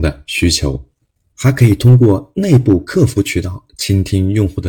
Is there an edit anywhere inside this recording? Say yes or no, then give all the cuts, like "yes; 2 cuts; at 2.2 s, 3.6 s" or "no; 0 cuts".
yes; 1 cut; at 1.3 s